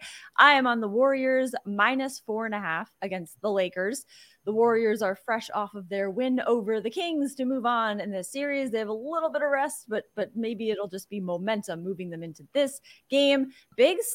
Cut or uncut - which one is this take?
uncut